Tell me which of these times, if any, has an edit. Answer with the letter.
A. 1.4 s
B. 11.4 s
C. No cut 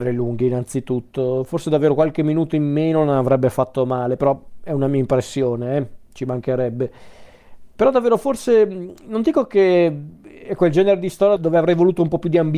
B